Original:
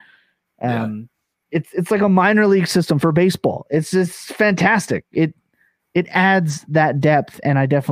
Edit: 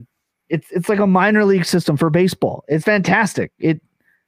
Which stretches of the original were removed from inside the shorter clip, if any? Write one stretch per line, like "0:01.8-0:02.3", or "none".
0:03.8-0:04.4